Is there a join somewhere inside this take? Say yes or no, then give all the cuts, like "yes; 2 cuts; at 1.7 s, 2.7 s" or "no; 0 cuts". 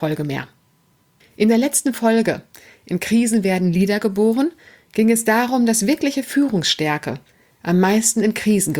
yes; 1 cut; at 1.2 s